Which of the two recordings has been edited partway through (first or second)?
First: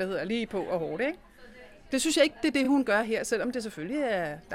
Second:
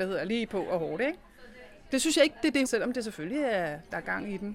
second